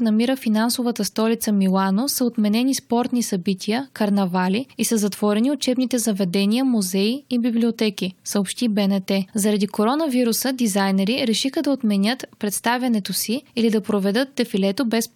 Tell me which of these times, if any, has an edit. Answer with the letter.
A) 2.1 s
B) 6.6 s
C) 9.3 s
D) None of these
C